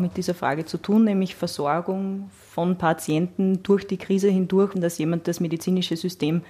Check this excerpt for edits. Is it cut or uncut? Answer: cut